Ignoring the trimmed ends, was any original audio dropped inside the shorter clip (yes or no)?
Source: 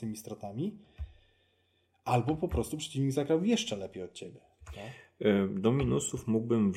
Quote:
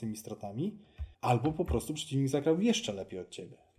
yes